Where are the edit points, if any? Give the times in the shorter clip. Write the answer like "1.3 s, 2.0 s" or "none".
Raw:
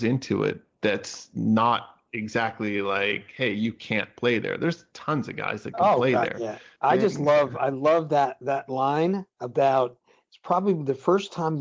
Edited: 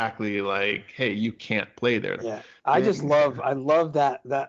2.2 s